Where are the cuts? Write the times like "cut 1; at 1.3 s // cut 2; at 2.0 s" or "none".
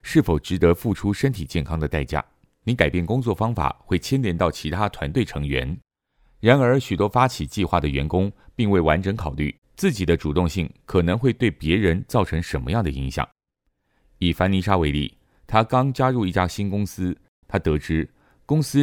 cut 1; at 2.6 s // cut 2; at 17.4 s